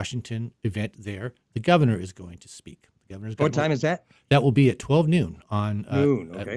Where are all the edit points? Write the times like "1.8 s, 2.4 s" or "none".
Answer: none